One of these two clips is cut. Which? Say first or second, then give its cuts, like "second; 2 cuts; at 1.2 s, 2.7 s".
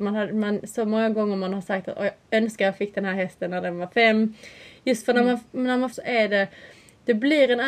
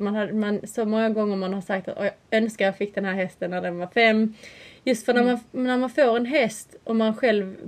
first; 1 cut; at 5.9 s